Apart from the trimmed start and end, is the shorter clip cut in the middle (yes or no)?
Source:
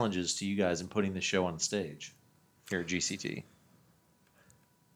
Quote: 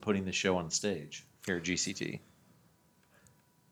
yes